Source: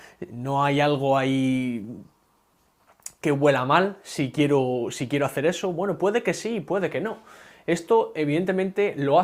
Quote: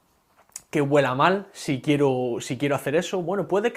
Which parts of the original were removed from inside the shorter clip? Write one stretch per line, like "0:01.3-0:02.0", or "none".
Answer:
none